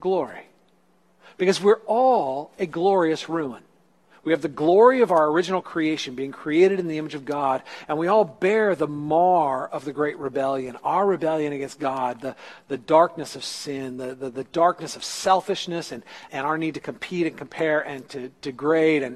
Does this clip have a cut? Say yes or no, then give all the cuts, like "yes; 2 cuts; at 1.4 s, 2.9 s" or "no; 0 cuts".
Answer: yes; 1 cut; at 16.3 s